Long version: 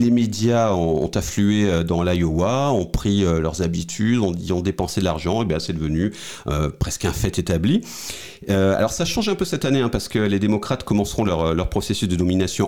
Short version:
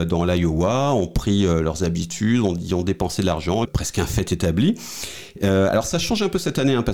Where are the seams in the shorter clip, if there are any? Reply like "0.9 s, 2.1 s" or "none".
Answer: 3.7 s